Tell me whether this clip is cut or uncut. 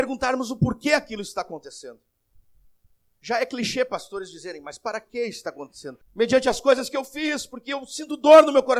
cut